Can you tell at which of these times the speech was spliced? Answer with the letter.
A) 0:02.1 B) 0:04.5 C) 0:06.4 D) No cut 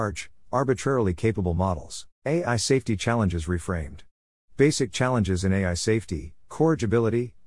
A